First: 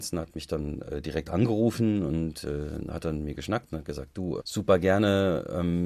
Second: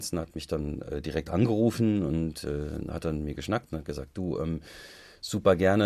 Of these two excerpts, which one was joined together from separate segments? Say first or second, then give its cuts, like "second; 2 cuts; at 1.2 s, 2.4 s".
first; 1 cut; at 4.4 s